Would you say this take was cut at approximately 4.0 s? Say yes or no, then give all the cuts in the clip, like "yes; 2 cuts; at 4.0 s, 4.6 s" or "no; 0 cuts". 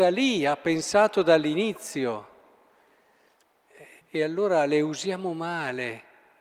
yes; 1 cut; at 4.0 s